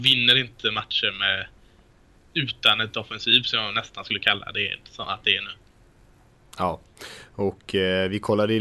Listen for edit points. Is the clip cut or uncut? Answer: uncut